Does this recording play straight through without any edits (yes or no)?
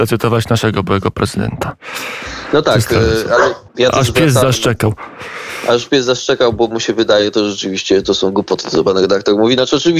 no